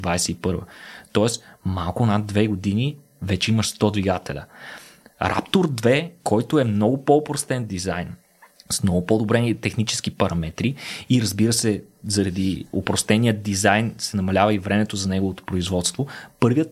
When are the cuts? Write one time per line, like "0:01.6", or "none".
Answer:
none

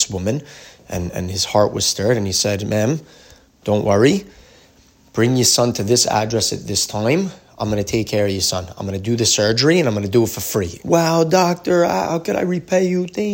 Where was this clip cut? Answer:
0:10.8

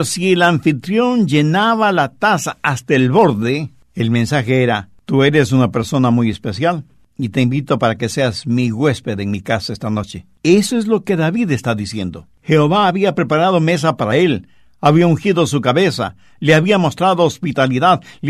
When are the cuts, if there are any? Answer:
none

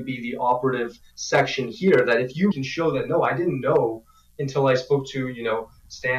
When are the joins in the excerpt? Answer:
0:02.5

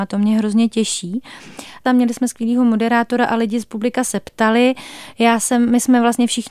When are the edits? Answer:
0:01.9

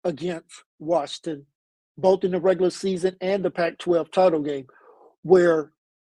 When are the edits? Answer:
none

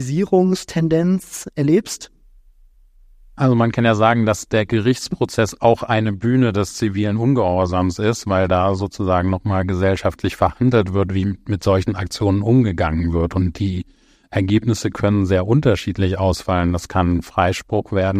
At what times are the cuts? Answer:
none

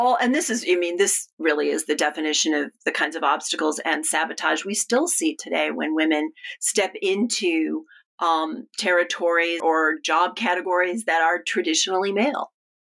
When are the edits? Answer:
0:09.6

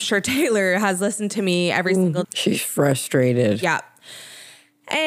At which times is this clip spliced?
0:02.2

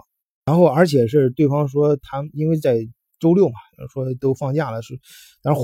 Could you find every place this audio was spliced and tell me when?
none

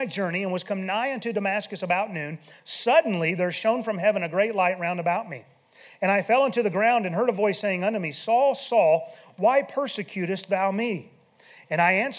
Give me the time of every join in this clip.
none

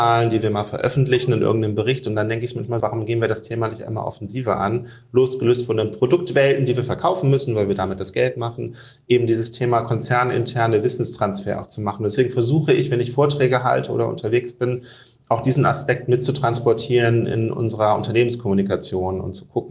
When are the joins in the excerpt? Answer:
0:02.8

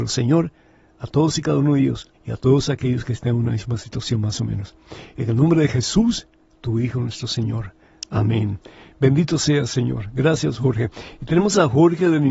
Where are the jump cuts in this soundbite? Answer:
0:02.1

